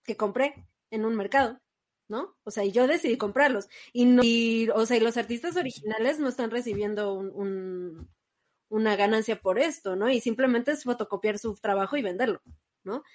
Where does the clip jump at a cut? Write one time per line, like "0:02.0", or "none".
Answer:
none